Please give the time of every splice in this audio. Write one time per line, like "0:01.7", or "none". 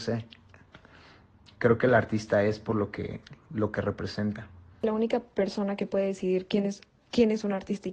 none

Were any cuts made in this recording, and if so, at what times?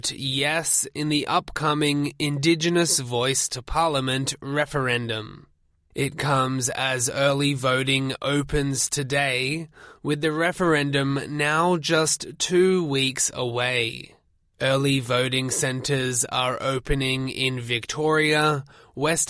none

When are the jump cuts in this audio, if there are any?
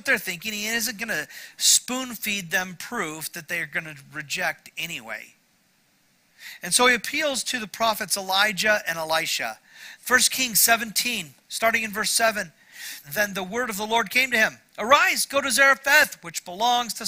0:10.0
0:13.0

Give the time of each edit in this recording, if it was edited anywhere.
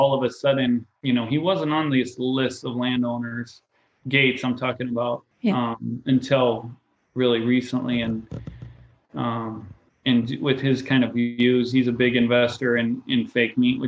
0:05.3

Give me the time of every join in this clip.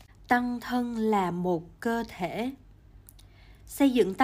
none

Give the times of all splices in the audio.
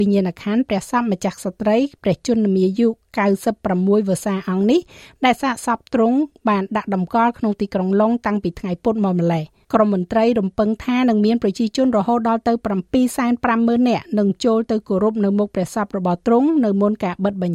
0:09.6

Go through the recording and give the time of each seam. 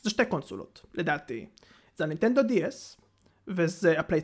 none

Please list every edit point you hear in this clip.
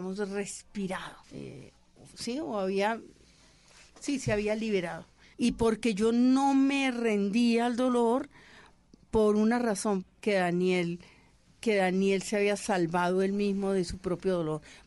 0:01.2
0:05.3
0:10.0

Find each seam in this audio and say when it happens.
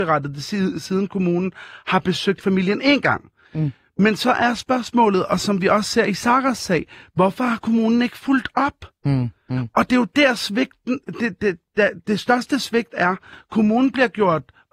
none

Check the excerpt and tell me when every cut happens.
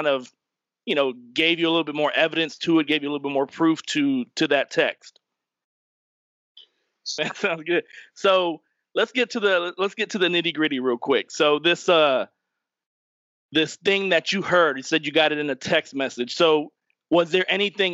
0:07.2

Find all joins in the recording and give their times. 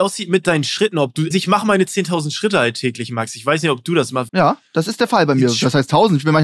0:01.3
0:04.3

